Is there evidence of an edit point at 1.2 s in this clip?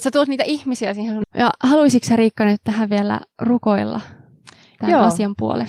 yes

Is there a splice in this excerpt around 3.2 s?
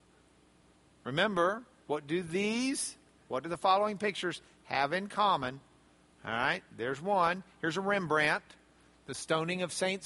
yes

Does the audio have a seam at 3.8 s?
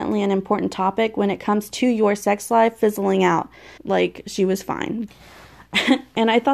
yes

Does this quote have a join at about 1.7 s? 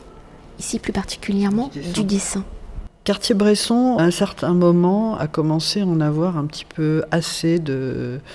no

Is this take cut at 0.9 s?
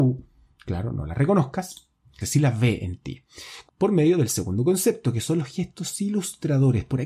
no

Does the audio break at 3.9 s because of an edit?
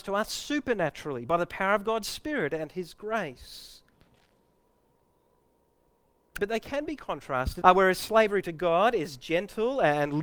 no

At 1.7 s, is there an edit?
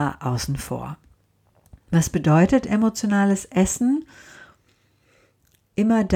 no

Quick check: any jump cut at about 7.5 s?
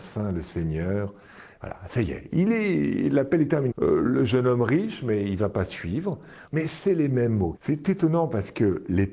yes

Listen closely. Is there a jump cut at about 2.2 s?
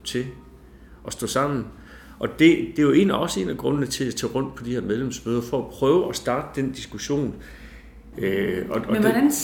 no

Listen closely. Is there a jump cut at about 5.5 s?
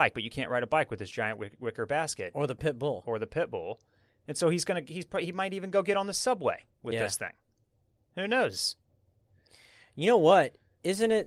no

